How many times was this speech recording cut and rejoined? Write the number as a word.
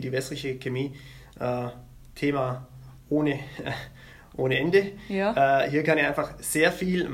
zero